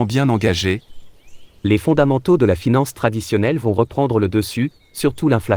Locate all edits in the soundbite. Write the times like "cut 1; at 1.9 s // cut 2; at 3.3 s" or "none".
cut 1; at 1.6 s